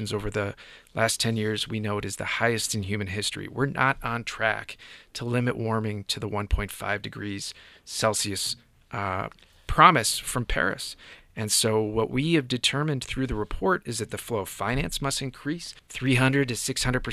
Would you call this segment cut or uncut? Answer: cut